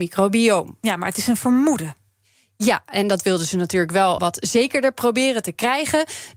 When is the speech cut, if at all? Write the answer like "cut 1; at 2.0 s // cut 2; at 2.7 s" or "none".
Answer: cut 1; at 4.2 s